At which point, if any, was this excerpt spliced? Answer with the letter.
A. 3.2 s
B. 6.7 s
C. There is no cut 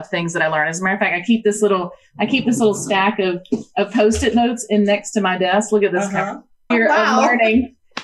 B